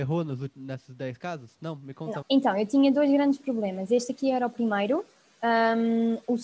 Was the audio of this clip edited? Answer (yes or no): yes